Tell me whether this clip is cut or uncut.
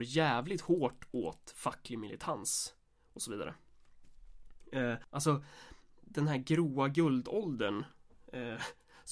cut